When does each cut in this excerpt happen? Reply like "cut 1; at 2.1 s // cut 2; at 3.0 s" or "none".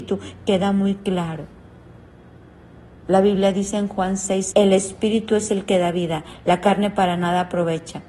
cut 1; at 3.0 s // cut 2; at 4.5 s